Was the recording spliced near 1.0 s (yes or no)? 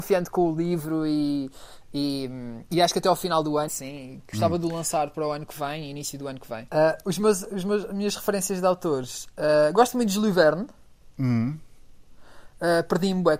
no